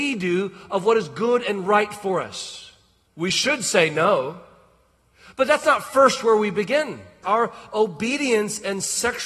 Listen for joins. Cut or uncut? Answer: cut